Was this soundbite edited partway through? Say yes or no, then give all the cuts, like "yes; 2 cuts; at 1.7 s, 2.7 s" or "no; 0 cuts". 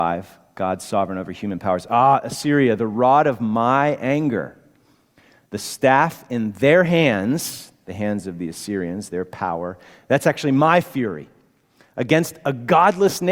no; 0 cuts